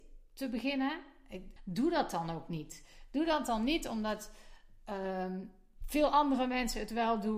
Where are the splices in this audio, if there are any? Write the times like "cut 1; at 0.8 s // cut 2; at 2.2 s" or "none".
cut 1; at 1.6 s